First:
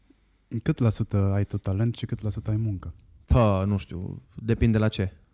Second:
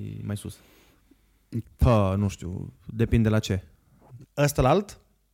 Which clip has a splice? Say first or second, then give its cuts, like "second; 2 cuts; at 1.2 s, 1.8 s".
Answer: second; 2 cuts; at 1.6 s, 4.2 s